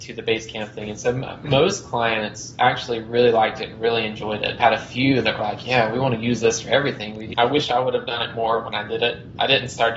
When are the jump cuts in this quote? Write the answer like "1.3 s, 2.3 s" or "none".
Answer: 4.6 s, 7.3 s